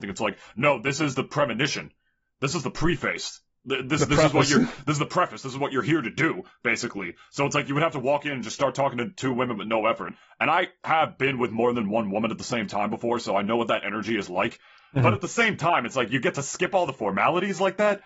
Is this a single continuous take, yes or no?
no